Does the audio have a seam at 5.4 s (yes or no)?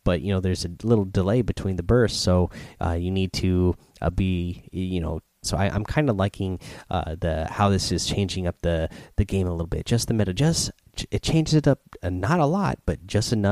yes